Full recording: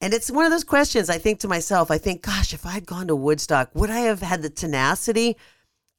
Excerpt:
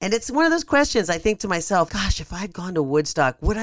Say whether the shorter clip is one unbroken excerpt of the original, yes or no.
no